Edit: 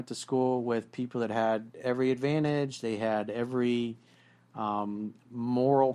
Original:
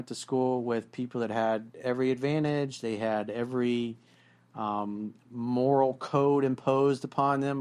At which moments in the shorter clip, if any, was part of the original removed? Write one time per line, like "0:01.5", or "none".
none